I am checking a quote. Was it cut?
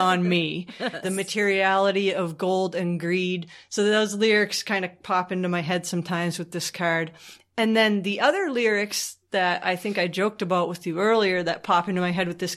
yes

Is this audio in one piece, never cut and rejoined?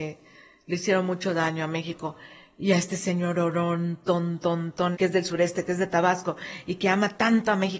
no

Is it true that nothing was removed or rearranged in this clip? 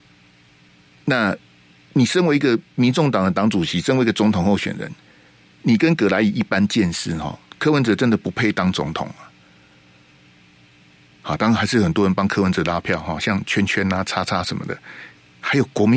no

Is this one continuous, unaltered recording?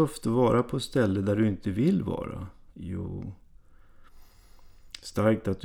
yes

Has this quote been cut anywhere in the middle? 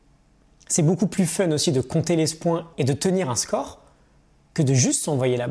yes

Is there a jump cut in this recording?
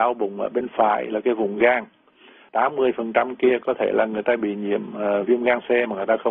yes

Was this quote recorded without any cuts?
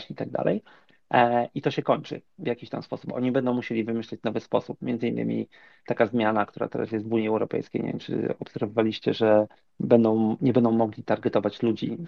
yes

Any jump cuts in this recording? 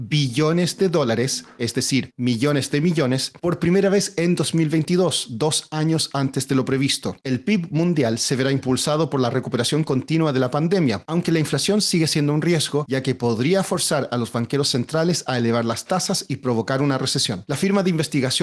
no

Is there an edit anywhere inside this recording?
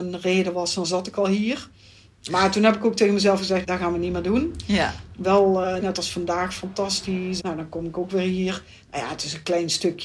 yes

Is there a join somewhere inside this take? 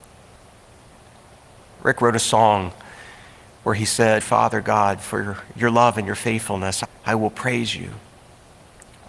yes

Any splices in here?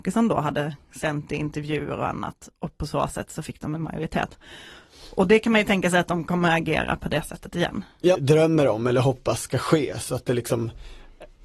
yes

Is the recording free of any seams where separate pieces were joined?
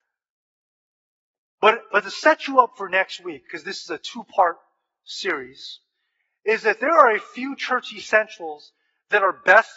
yes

